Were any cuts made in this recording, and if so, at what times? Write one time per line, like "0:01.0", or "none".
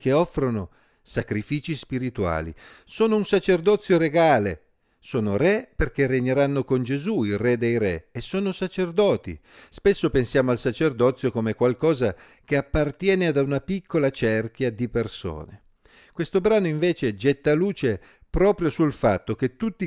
none